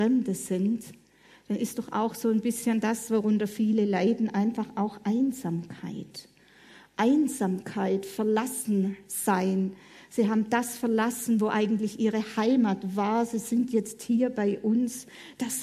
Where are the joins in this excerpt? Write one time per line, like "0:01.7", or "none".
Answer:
none